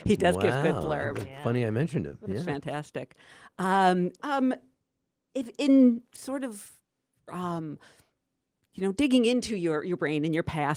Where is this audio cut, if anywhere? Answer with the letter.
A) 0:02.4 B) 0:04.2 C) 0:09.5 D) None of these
B